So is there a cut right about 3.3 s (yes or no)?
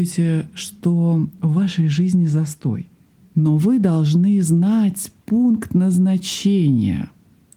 yes